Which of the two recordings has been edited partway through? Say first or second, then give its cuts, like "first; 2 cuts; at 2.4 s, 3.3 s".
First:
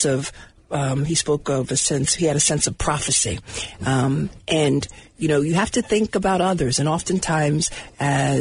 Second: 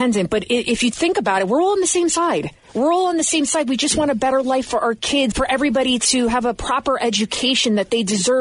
second; 1 cut; at 5.3 s